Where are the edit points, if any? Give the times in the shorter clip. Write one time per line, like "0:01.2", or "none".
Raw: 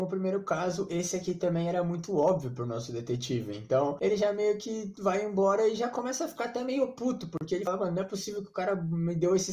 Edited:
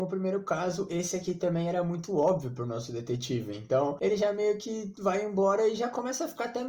none